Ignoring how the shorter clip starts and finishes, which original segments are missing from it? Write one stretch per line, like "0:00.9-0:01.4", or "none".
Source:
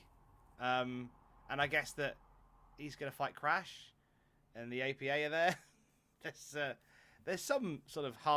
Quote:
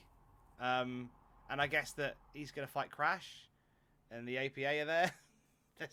0:02.3-0:02.7